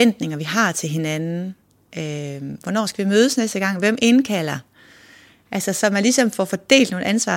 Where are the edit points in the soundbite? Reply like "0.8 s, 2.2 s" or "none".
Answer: none